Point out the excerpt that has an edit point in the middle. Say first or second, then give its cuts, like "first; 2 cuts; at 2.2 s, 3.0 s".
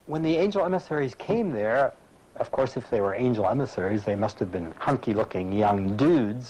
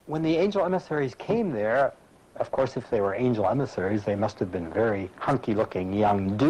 first; 1 cut; at 4.7 s